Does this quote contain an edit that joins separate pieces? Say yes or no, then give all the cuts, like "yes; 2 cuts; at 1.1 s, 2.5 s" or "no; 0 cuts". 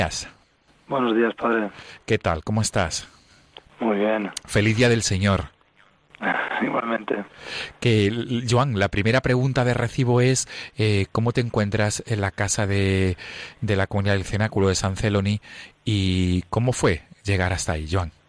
no; 0 cuts